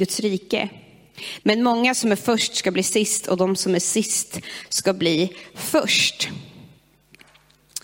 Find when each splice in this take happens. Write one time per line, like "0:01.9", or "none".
0:01.4

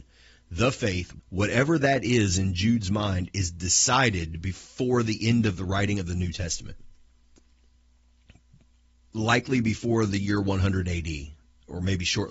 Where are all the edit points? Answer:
0:01.2

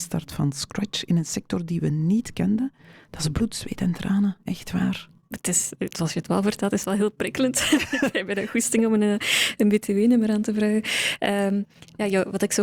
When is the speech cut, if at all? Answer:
0:04.4

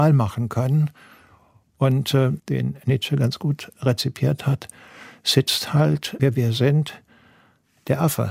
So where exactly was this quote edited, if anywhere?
0:02.4
0:06.2

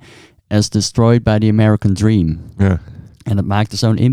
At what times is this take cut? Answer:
none

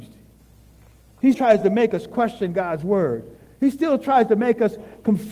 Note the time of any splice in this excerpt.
0:01.3

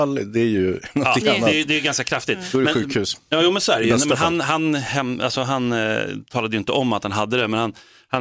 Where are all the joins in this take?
none

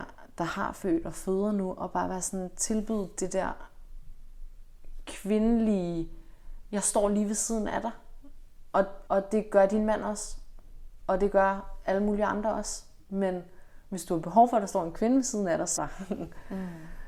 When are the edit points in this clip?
0:09.1
0:15.8

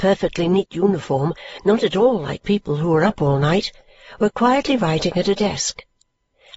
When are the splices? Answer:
none

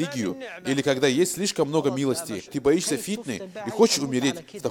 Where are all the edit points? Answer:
0:02.5

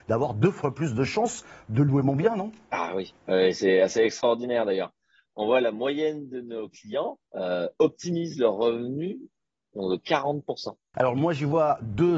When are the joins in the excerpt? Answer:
0:07.3
0:10.9

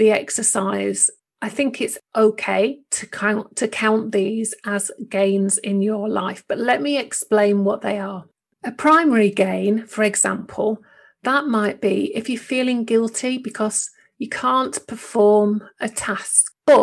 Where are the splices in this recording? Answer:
none

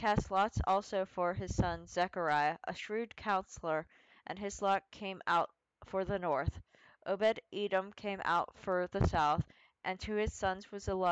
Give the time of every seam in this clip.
none

